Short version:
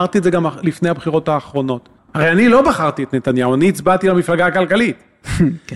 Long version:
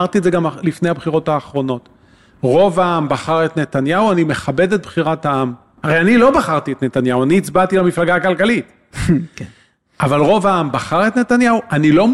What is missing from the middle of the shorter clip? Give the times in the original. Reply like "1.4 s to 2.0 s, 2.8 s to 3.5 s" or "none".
2.0 s to 5.7 s